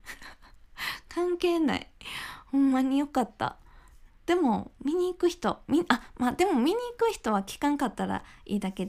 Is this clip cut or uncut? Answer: cut